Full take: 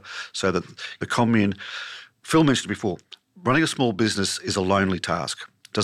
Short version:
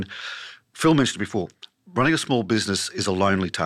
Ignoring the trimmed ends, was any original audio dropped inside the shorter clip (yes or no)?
no